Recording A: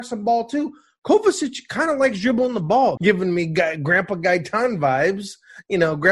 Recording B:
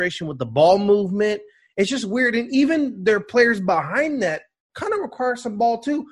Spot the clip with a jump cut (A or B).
A